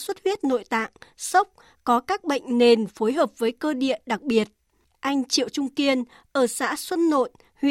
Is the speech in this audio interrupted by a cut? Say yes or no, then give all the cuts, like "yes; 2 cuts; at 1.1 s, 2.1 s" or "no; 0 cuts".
no; 0 cuts